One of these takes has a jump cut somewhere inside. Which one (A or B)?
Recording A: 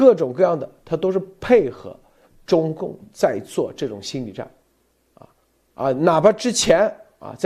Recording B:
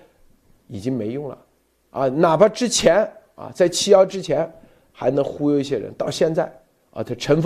A